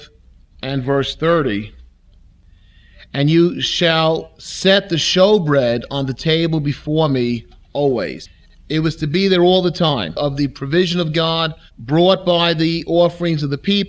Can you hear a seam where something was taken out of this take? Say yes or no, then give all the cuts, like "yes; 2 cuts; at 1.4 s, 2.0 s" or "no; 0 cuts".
yes; 1 cut; at 10.2 s